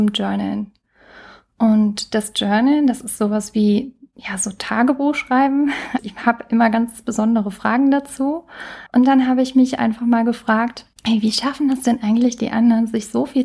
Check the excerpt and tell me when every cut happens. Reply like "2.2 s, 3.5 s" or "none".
6.0 s, 8.9 s, 10.9 s